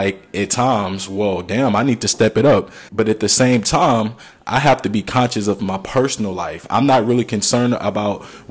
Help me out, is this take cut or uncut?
cut